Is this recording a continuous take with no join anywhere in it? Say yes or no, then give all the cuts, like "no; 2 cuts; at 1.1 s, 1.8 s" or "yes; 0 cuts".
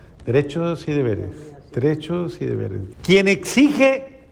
no; 1 cut; at 2.9 s